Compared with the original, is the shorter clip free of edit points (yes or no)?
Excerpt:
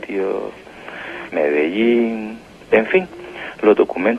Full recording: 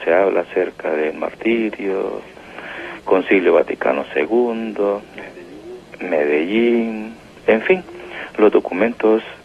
no